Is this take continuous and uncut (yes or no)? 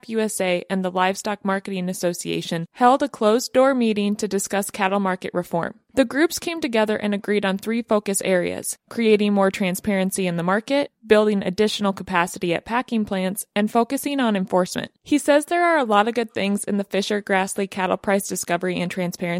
no